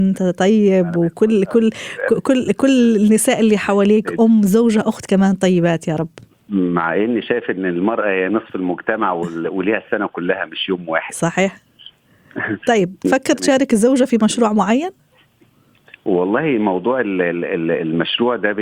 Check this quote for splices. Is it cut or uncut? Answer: uncut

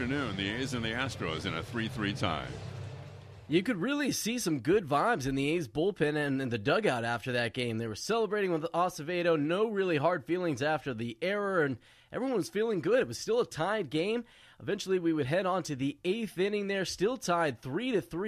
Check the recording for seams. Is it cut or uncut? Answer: uncut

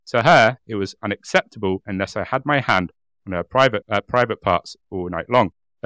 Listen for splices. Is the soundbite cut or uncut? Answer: cut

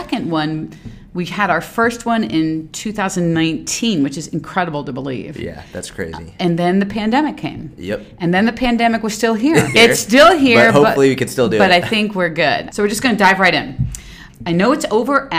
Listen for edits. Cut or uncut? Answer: cut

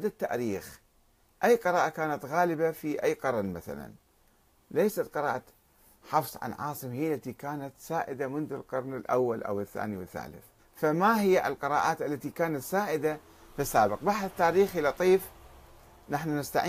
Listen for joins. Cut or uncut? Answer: cut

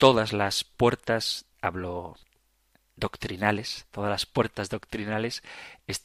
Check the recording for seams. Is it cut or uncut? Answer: cut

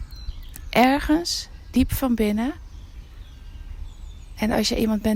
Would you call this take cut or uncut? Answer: uncut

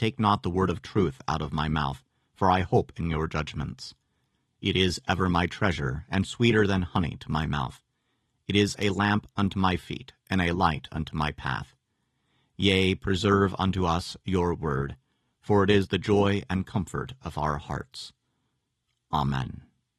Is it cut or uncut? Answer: uncut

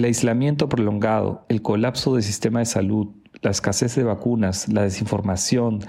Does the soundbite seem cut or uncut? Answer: uncut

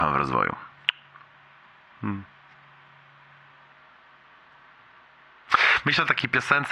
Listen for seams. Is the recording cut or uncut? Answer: uncut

